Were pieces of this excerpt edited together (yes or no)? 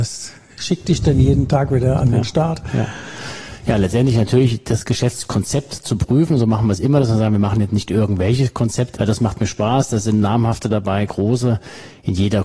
yes